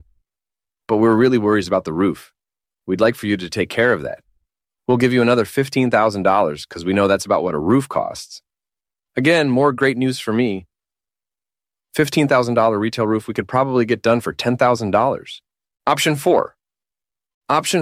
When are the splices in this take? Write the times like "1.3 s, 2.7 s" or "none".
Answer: 15.8 s